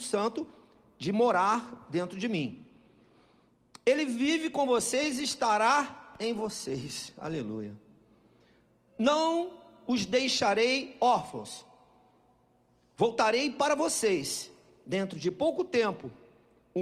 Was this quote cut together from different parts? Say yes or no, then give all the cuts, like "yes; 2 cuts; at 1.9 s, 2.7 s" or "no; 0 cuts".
no; 0 cuts